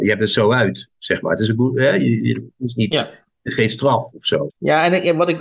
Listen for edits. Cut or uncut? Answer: cut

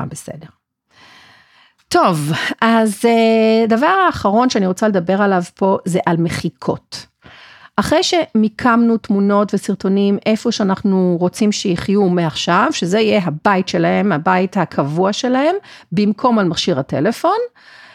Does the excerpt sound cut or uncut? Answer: uncut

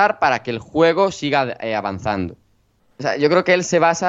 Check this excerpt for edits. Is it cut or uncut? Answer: cut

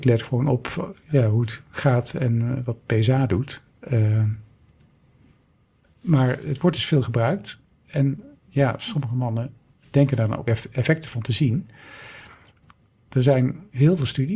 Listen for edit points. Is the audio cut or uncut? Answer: uncut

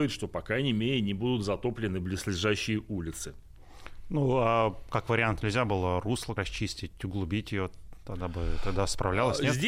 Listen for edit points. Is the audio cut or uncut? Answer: cut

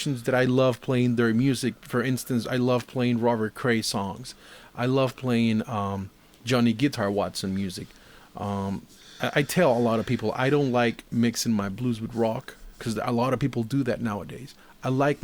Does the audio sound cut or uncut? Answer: uncut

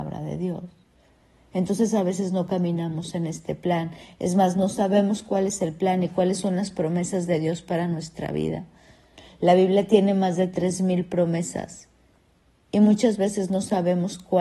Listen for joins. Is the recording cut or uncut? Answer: uncut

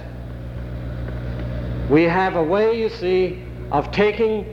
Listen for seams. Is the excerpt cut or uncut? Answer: uncut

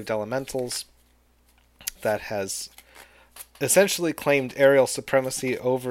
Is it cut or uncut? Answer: cut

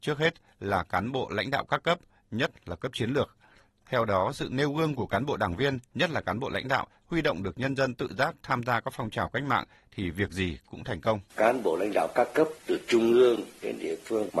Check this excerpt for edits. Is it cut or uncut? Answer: cut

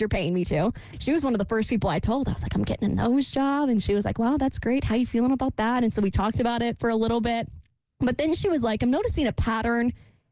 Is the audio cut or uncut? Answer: cut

